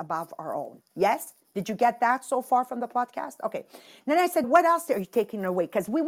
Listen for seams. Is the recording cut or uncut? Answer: cut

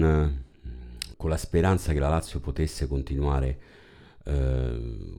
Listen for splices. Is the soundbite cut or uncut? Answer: cut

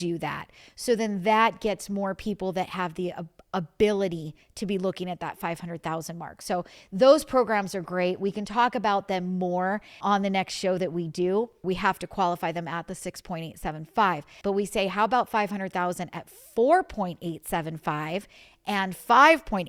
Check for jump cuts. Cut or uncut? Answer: cut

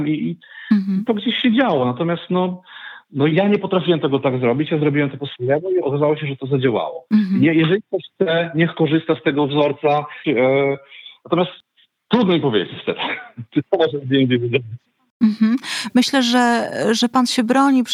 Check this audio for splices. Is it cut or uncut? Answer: cut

